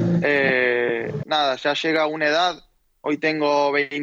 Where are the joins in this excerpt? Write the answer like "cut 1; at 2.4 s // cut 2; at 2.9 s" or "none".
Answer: cut 1; at 1.2 s